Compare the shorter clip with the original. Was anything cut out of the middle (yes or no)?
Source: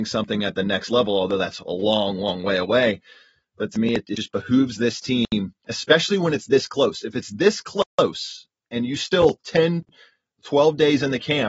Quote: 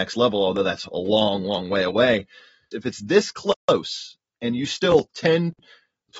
yes